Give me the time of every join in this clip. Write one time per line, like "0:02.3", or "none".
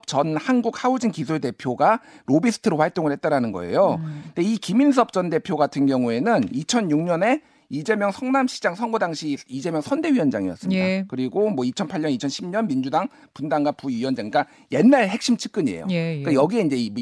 none